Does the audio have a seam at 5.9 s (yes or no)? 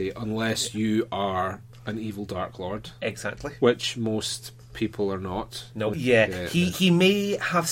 yes